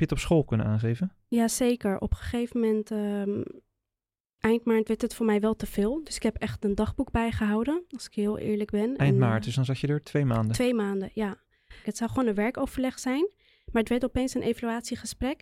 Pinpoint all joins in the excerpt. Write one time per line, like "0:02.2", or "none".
0:11.8